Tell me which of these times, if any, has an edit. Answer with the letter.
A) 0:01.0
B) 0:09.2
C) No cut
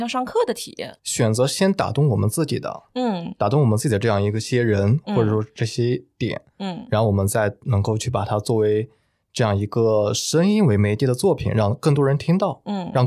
A